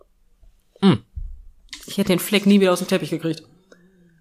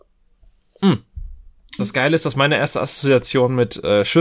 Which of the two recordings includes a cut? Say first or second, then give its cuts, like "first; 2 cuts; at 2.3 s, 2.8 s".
second; 1 cut; at 1.8 s